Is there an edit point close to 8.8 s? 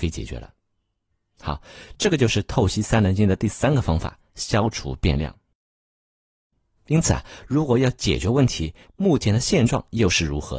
yes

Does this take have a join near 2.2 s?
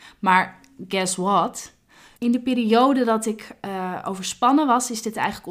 yes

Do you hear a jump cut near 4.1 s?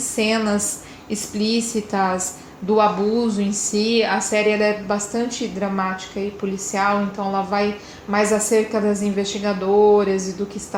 no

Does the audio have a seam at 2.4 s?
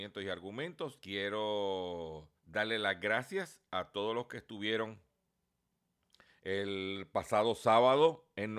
yes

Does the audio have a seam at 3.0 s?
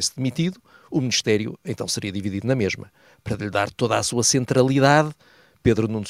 no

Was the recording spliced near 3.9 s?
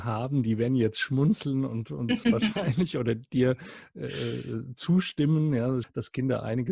no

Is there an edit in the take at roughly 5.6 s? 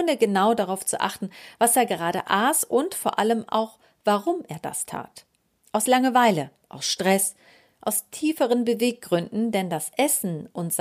yes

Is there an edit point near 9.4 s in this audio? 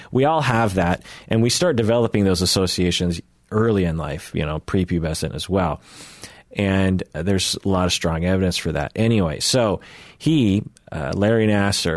no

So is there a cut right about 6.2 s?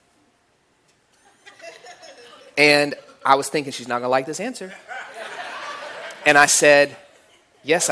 no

